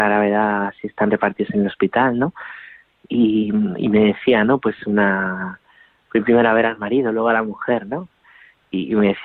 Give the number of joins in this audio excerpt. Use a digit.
0